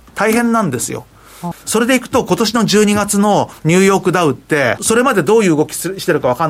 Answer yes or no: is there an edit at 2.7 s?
no